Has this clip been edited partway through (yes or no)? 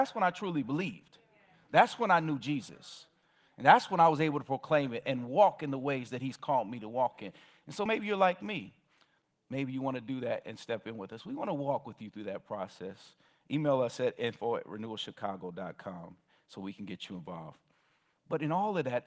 no